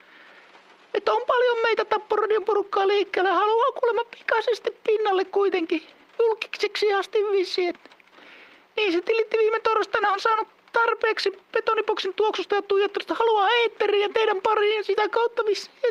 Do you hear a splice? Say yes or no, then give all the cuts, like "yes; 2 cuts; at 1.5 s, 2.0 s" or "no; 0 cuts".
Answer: no; 0 cuts